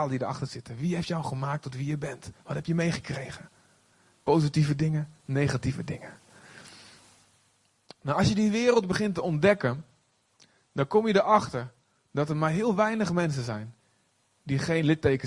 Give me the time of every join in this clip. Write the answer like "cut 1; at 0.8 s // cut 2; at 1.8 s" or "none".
none